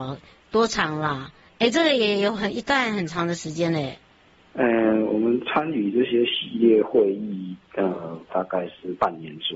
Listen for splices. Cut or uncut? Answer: cut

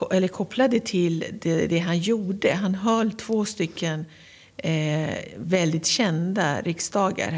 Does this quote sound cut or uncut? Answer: uncut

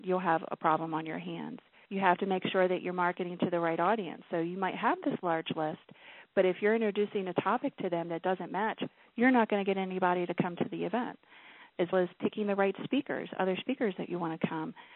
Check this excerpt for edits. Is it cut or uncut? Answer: cut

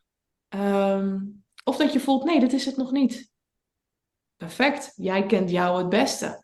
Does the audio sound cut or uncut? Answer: uncut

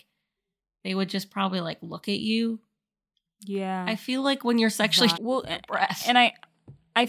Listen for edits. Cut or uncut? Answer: cut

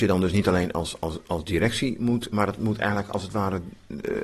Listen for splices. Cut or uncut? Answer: cut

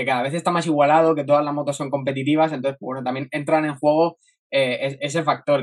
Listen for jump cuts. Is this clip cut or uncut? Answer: uncut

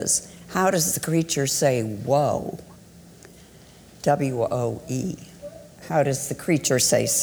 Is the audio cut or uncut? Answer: uncut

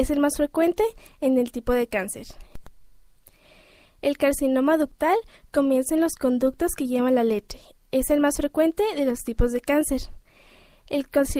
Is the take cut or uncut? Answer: uncut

